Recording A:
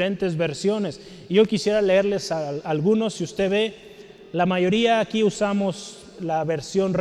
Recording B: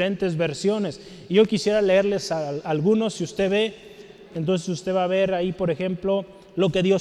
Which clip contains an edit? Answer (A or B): B